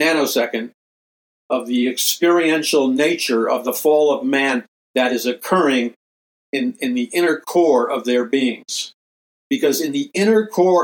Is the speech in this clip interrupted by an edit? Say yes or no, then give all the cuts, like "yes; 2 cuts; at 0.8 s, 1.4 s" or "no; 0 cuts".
no; 0 cuts